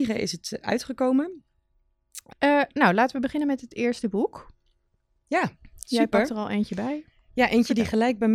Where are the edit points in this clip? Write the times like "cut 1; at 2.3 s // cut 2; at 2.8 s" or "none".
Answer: cut 1; at 2.3 s